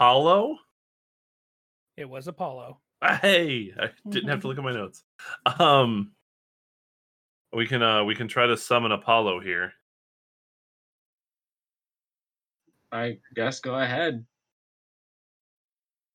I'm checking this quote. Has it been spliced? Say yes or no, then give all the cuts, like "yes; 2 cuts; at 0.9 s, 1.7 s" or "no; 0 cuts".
no; 0 cuts